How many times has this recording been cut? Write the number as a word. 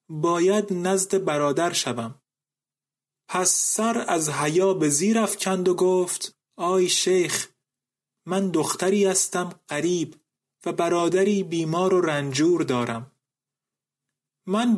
one